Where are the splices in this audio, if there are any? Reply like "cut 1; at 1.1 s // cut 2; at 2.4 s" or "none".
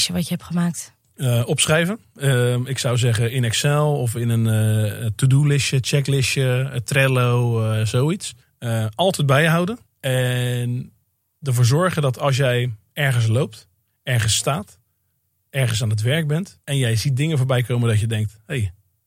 cut 1; at 13.9 s // cut 2; at 16.6 s